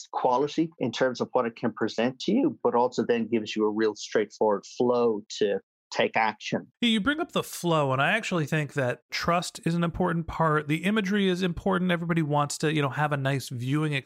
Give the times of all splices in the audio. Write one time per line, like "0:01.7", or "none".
0:06.7